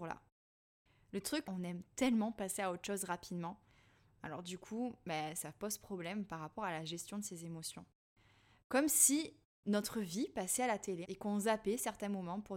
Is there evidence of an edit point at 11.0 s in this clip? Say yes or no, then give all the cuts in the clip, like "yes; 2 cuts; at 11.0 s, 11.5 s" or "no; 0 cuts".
yes; 2 cuts; at 1.4 s, 11.0 s